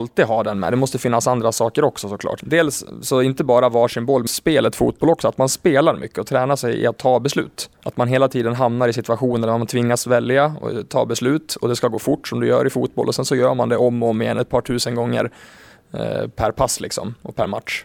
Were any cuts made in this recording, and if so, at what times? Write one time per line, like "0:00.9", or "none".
0:02.4
0:04.3
0:07.7